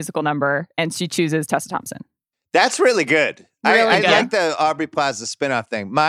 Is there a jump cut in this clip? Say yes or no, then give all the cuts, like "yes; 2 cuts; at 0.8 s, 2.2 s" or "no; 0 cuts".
no; 0 cuts